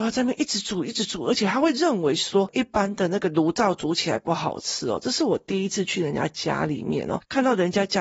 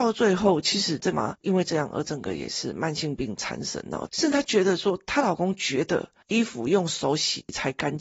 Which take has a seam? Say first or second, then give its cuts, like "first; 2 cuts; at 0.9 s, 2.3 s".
second; 2 cuts; at 1.1 s, 4.1 s